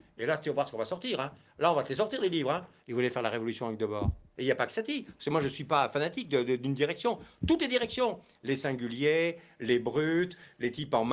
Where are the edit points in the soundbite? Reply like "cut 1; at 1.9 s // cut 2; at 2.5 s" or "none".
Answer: cut 1; at 2.8 s // cut 2; at 4.3 s